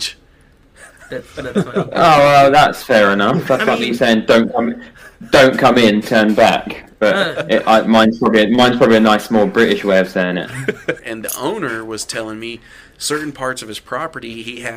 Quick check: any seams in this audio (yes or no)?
yes